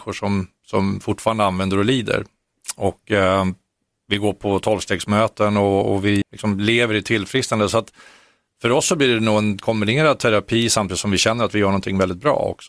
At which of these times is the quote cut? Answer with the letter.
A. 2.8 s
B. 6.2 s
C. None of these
B